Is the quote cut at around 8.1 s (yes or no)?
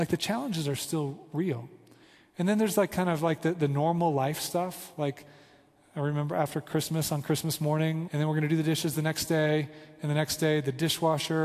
yes